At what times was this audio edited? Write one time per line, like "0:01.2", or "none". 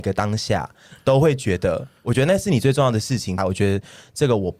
0:03.4